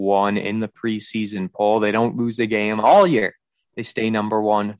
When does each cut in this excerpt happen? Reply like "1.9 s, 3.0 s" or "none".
none